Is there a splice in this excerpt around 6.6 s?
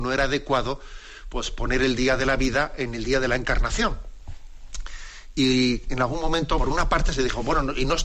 yes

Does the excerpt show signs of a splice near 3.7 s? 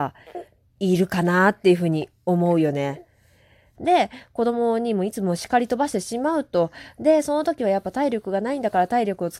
yes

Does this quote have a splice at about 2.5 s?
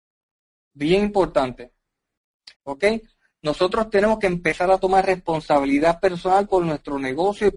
yes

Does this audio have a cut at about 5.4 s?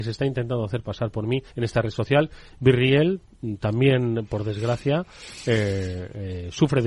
no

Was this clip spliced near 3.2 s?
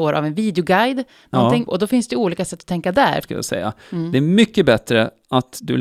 yes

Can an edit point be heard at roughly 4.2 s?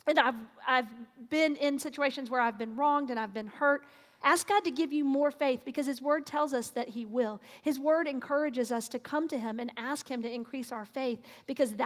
yes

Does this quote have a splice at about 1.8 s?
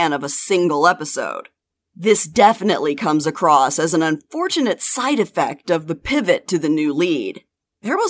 no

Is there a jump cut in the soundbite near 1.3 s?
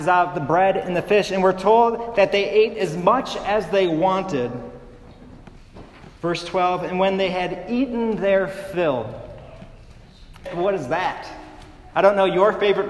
no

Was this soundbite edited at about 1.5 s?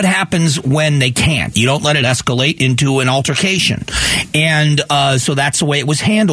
yes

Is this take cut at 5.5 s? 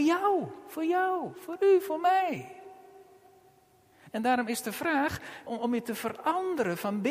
yes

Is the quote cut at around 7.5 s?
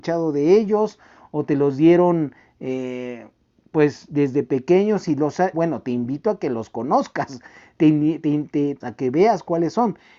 no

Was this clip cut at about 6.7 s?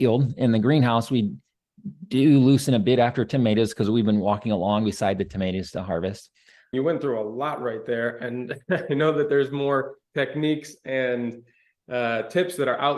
yes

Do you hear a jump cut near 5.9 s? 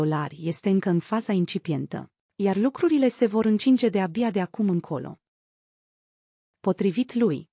no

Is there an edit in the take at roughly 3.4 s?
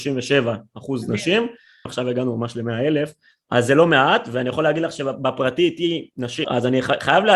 no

